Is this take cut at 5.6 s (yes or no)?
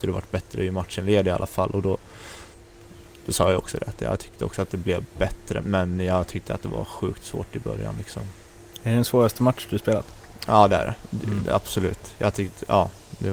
yes